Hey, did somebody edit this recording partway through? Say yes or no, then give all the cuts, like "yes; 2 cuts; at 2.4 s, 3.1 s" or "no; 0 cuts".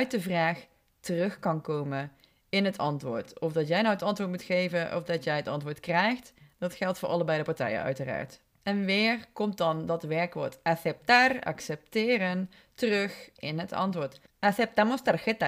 yes; 1 cut; at 8.5 s